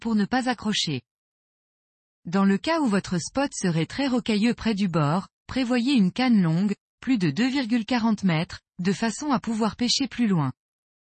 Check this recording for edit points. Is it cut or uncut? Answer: uncut